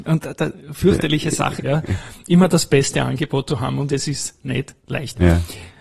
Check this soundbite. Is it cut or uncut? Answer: cut